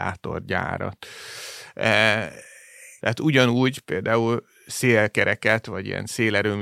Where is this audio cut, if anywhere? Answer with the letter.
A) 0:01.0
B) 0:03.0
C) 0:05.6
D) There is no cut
B